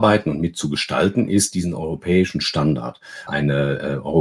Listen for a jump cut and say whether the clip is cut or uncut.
cut